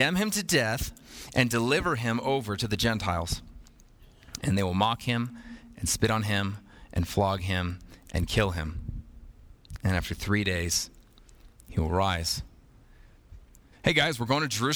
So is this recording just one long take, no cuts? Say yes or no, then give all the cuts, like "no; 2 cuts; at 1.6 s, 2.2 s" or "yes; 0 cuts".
no; 1 cut; at 13.7 s